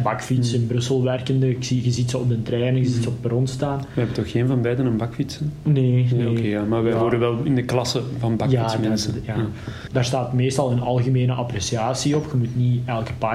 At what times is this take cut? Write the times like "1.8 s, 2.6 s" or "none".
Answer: 9.9 s